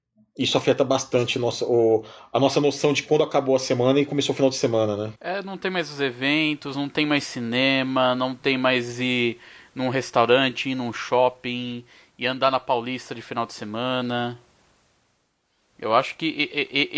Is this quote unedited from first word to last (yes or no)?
yes